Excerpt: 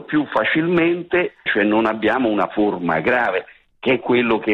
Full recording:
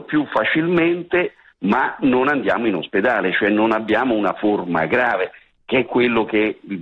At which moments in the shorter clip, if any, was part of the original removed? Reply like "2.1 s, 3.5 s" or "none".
1.5 s